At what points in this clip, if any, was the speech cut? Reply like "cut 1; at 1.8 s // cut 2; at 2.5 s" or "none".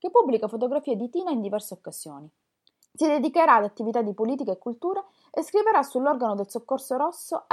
cut 1; at 2.8 s